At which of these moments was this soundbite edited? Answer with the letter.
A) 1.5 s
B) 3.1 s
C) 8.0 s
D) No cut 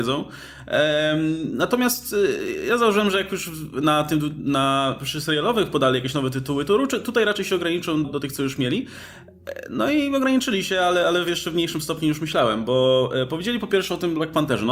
C